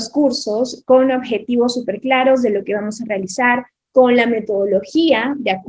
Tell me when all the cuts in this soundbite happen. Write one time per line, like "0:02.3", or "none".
none